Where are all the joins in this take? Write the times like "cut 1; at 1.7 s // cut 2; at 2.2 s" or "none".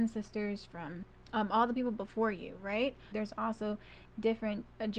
cut 1; at 3.1 s